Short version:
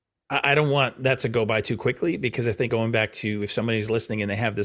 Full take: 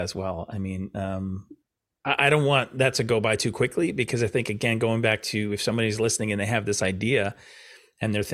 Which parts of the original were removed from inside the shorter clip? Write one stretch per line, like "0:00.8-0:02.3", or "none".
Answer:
0:04.4-0:04.8